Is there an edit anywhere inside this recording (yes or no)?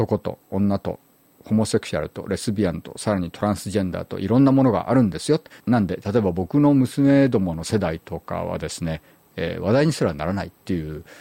yes